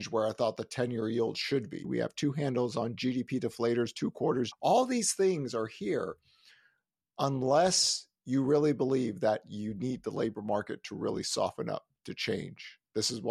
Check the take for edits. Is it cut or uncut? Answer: cut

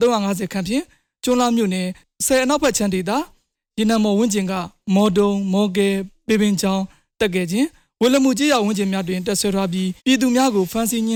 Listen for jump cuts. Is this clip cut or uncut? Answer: cut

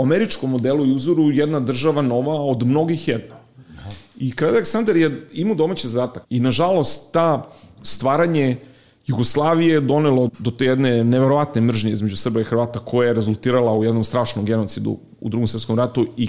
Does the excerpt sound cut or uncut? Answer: cut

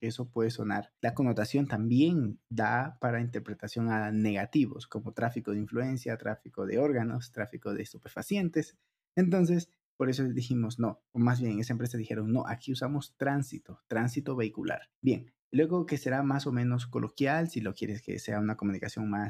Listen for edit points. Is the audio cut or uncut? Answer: uncut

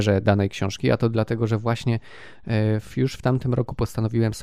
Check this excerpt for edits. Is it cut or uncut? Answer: uncut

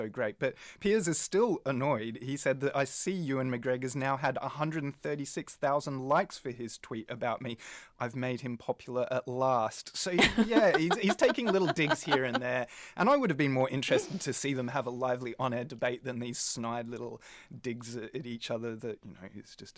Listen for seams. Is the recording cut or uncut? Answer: uncut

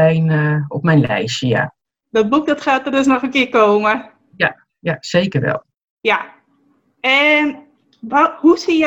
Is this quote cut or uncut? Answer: uncut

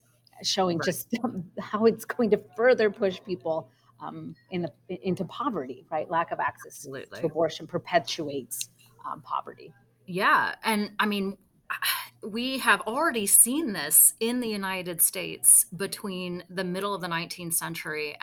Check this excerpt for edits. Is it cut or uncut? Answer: uncut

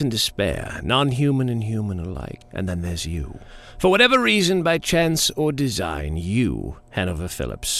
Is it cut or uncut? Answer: cut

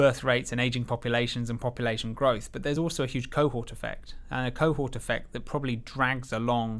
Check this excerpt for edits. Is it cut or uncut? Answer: uncut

